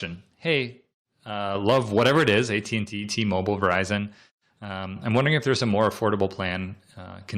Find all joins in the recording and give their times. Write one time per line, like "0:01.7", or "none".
none